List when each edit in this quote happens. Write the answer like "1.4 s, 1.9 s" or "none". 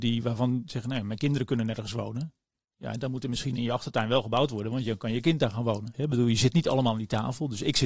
5.9 s